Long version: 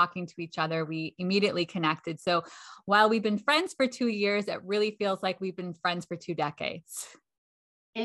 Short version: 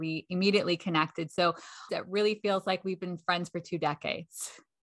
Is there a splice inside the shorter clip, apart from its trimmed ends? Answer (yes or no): yes